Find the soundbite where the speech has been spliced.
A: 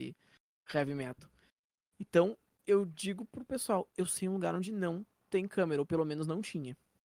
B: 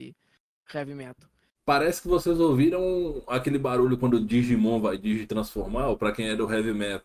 B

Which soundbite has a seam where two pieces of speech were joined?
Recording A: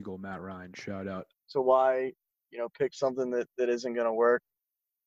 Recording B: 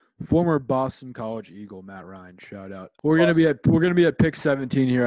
A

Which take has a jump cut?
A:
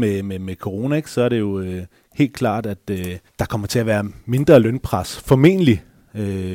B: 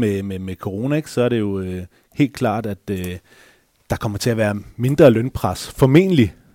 A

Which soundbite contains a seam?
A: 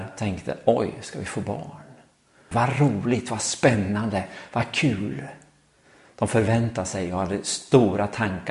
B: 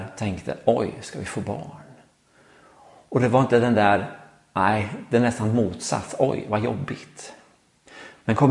A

